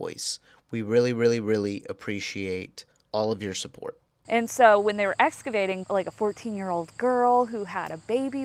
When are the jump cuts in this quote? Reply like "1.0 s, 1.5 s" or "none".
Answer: 4.2 s, 5.8 s